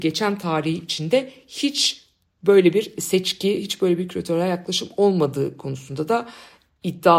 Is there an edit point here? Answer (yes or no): no